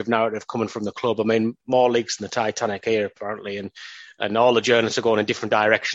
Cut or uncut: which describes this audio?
uncut